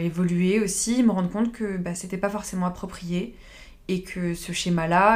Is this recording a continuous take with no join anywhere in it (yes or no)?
yes